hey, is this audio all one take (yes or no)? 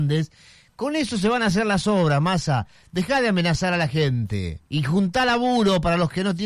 no